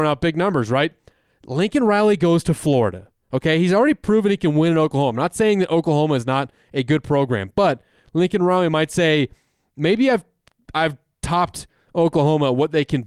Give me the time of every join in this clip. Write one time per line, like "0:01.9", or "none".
none